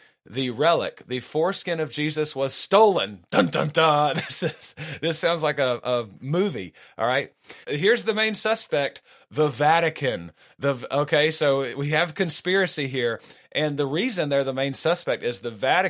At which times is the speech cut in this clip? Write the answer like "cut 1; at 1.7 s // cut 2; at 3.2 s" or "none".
cut 1; at 7.6 s

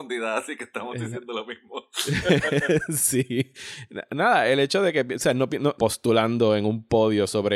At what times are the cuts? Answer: cut 1; at 5.8 s

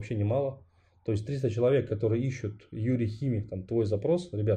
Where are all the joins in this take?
none

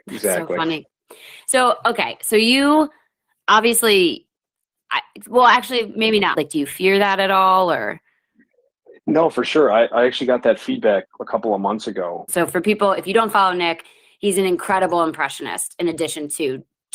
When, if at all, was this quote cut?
cut 1; at 6.3 s // cut 2; at 12.3 s

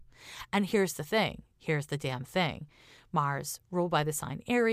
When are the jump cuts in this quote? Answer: none

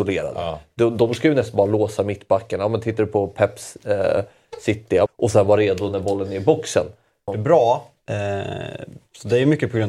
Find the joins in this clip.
cut 1; at 5.1 s // cut 2; at 7.3 s

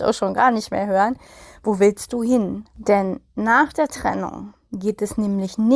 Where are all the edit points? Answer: cut 1; at 2.7 s

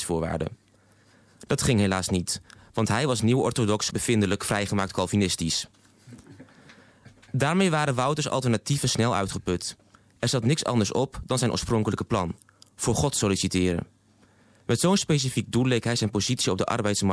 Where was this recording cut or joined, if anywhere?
cut 1; at 3.9 s

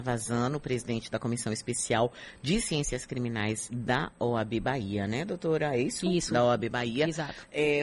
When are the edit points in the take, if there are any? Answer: none

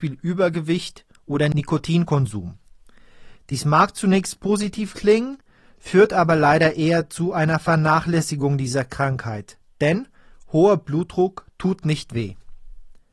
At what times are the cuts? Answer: cut 1; at 3.4 s

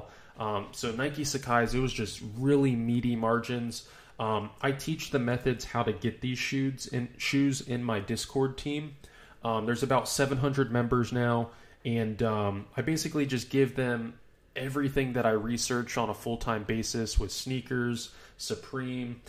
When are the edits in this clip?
none

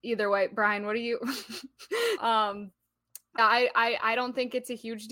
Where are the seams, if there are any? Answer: cut 1; at 2.2 s // cut 2; at 3.4 s

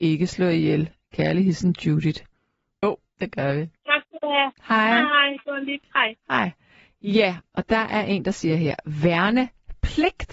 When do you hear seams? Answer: cut 1; at 2.8 s

